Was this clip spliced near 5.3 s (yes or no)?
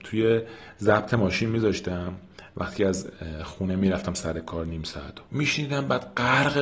yes